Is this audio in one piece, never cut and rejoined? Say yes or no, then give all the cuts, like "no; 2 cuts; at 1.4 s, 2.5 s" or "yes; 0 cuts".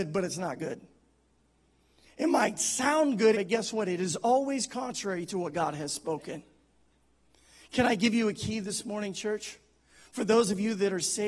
no; 1 cut; at 3.3 s